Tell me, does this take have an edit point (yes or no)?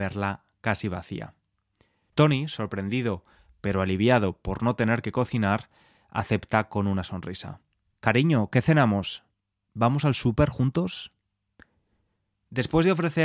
yes